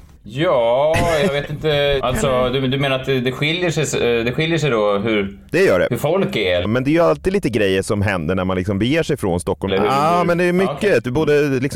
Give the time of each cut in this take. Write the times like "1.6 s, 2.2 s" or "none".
2.0 s, 6.6 s, 9.7 s